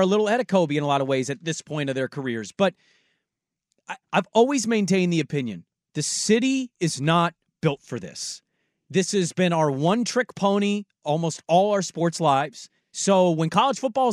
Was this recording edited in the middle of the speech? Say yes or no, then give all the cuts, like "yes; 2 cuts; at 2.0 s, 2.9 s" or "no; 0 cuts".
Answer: yes; 2 cuts; at 4.0 s, 12.8 s